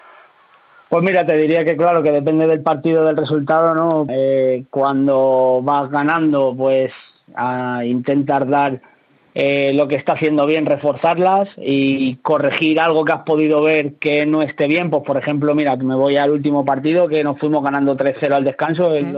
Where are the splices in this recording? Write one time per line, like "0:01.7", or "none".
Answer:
0:04.1